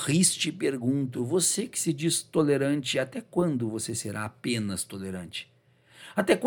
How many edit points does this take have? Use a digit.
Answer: 0